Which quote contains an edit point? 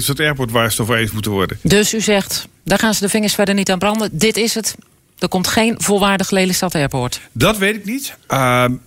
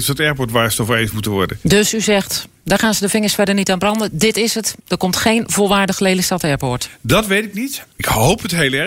second; 2 cuts; at 4.8 s, 7.9 s

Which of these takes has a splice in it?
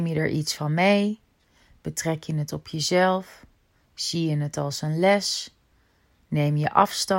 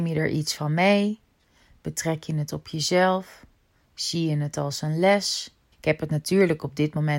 second; 1 cut; at 5.7 s

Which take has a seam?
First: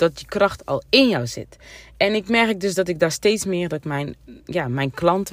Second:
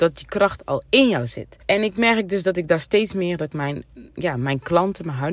second; 1 cut; at 1.6 s

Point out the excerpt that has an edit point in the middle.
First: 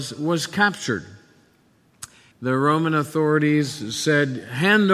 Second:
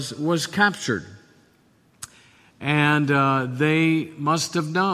first; 1 cut; at 2.3 s

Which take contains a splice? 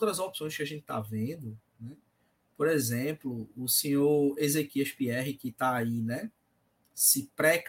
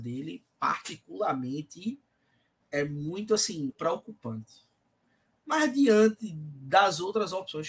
second; 2 cuts; at 2.6 s, 3.7 s

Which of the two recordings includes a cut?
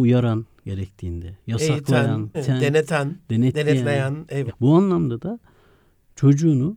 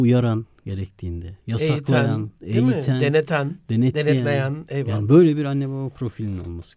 first; 2 cuts; at 2.3 s, 4.5 s

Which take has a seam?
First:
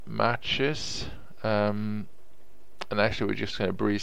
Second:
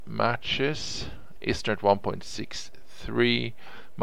second; 1 cut; at 1.4 s

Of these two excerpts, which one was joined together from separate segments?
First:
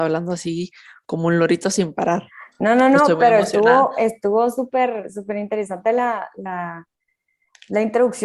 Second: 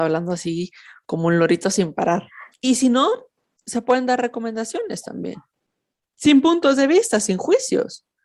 second; 1 cut; at 2.5 s

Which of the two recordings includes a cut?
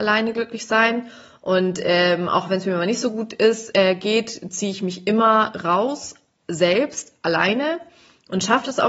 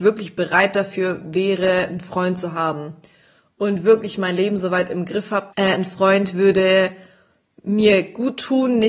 second; 1 cut; at 5.5 s

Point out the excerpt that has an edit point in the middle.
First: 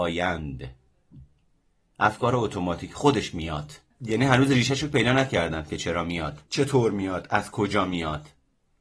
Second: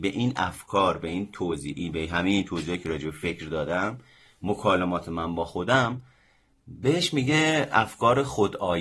first; 2 cuts; at 3.9 s, 6.5 s

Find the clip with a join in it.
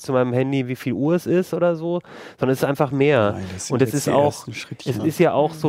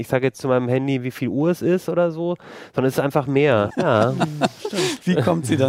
second; 1 cut; at 3.7 s

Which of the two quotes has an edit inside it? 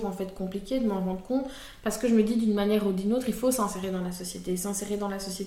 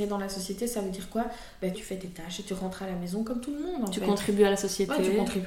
second; 1 cut; at 1.7 s

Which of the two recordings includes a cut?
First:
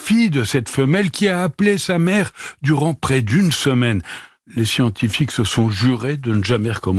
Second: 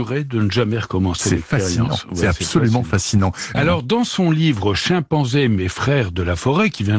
second; 1 cut; at 3.5 s

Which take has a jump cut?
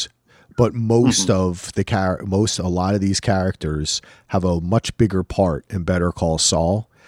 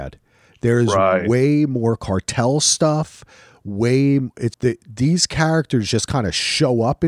second; 1 cut; at 4.5 s

